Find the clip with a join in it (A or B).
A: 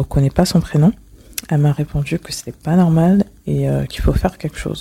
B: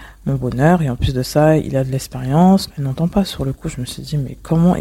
B